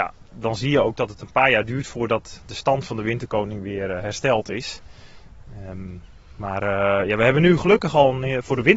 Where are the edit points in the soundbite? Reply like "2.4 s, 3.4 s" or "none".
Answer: none

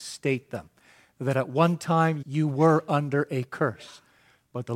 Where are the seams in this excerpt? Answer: 2.2 s

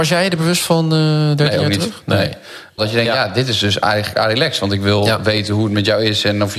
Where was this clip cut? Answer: 2.8 s

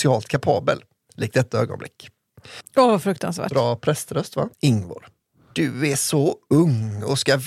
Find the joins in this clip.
2.6 s, 4.5 s

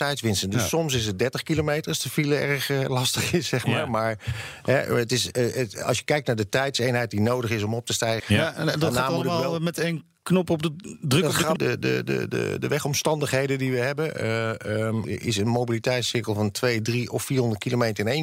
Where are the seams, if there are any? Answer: 8.2 s, 11.6 s, 15.0 s

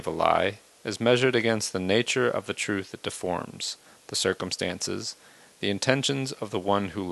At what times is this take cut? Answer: none

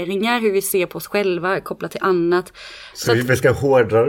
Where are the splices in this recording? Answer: 2.9 s

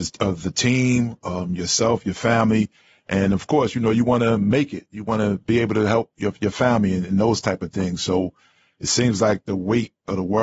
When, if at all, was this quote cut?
none

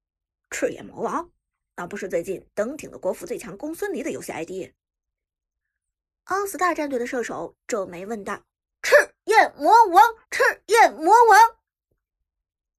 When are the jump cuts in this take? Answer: 8.7 s, 10.2 s

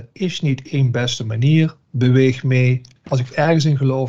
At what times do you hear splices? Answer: none

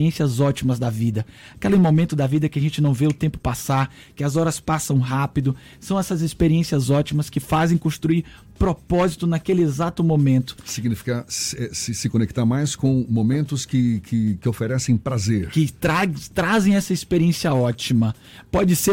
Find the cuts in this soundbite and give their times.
none

